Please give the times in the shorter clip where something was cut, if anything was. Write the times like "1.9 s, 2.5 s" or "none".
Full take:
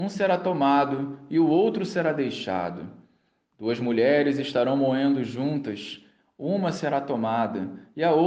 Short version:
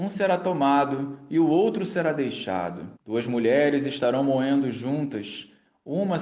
3.0 s